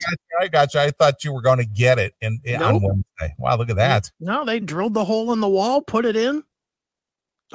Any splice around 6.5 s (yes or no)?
no